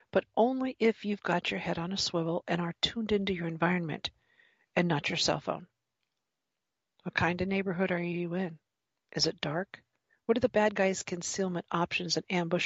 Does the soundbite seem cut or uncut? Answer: uncut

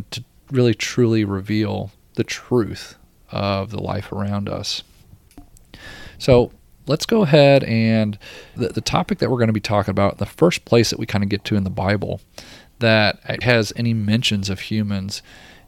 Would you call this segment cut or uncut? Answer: cut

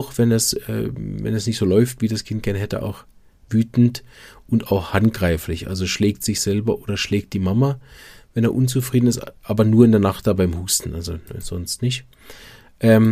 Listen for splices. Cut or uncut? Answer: uncut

